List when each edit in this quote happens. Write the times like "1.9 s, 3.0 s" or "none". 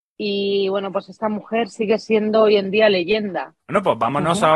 3.6 s